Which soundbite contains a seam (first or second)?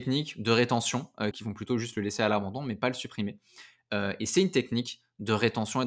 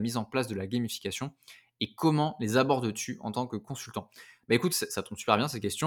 first